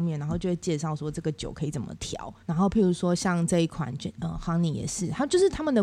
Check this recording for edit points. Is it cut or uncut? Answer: cut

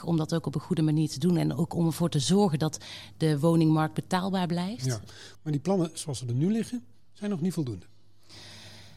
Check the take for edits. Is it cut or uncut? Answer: cut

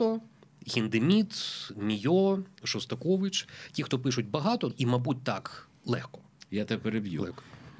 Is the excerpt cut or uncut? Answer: cut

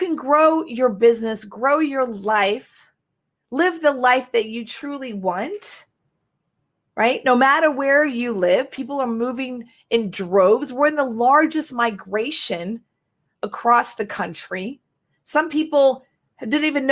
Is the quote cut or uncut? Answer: uncut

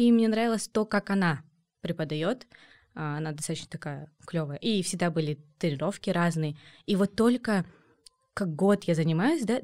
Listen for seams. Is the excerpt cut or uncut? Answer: uncut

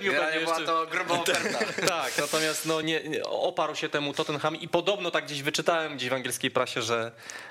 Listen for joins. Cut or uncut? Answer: cut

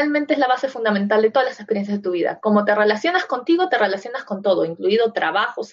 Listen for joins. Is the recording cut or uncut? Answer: uncut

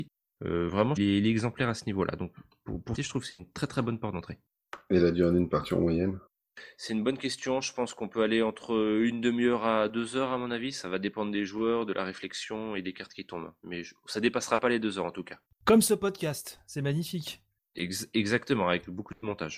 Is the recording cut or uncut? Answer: cut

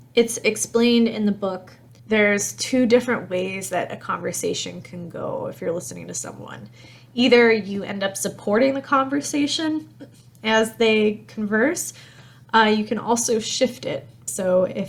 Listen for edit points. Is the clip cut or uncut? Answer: uncut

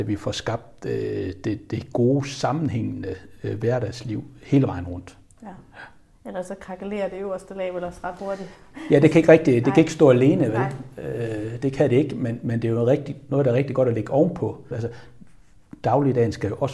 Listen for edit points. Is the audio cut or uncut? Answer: cut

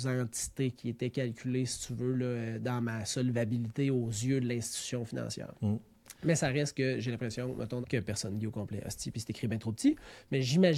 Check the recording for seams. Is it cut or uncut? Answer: cut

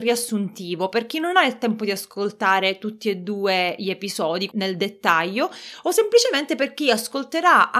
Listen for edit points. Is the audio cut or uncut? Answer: cut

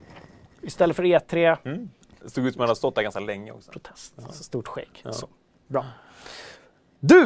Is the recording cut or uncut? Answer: cut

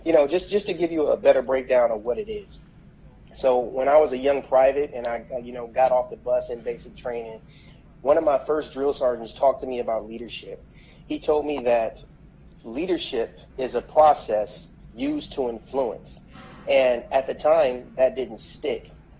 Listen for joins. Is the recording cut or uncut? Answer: cut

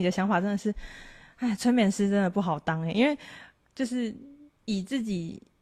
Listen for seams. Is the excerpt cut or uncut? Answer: uncut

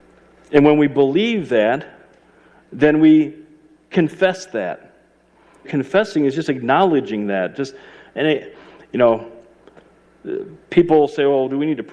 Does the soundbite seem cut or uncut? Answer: cut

